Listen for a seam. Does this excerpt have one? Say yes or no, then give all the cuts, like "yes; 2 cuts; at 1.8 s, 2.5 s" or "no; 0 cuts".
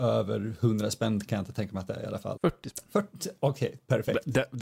yes; 1 cut; at 2.4 s